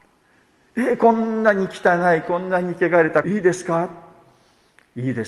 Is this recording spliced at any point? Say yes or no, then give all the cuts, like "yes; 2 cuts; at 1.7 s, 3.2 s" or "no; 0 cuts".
yes; 1 cut; at 3.2 s